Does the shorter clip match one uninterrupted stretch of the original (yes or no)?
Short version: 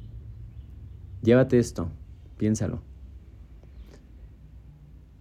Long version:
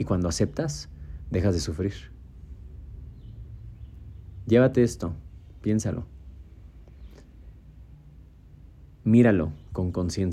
yes